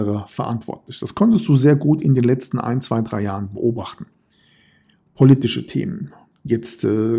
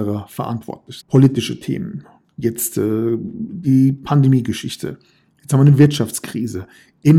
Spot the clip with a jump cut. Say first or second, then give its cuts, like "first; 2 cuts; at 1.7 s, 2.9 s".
second; 1 cut; at 1.0 s